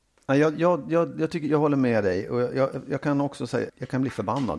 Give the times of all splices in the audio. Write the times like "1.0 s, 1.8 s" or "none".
3.7 s